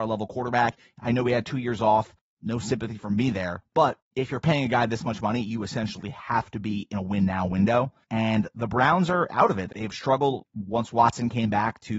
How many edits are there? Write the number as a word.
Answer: two